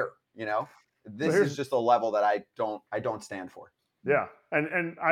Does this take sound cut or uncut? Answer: cut